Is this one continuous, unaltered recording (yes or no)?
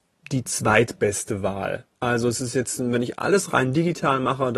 yes